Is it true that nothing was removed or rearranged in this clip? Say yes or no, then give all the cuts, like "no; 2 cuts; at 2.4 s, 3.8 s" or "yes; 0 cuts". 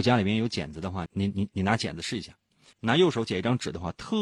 no; 2 cuts; at 1.1 s, 2.7 s